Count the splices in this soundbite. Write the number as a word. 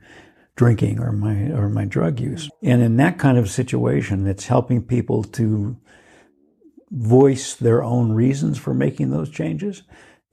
one